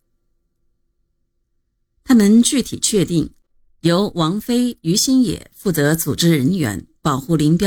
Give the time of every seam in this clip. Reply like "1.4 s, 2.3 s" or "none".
none